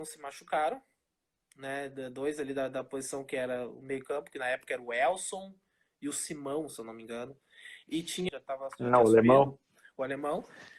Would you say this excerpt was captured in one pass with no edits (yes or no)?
no